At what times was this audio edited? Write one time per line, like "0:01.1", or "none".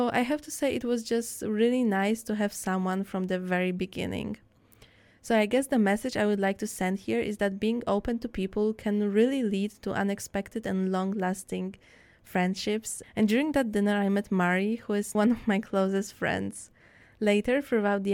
0:13.0
0:15.1